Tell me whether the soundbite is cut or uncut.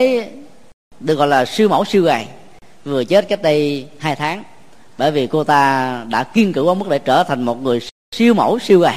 uncut